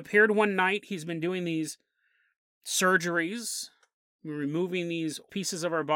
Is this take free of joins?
yes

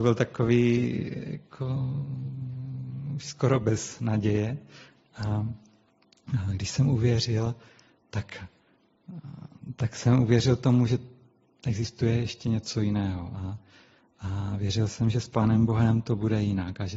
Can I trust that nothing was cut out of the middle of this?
yes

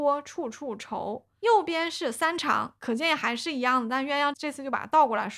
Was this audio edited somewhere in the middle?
yes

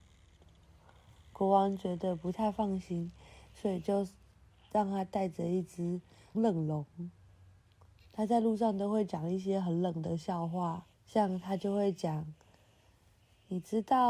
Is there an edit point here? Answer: yes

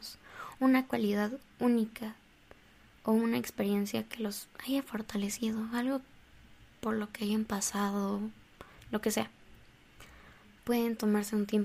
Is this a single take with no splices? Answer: no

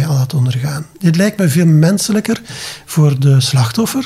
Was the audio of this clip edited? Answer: no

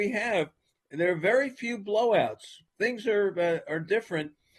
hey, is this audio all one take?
yes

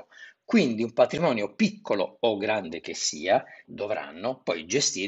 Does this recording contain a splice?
yes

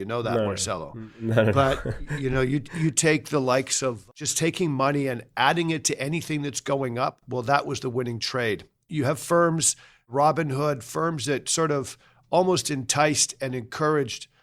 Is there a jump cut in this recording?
no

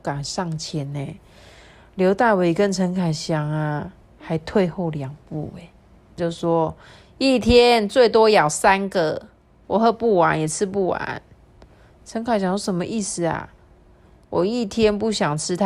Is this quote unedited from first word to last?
no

